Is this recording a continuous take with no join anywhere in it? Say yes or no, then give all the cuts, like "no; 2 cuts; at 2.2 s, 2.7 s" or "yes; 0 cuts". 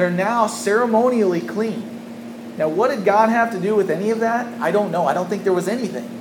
yes; 0 cuts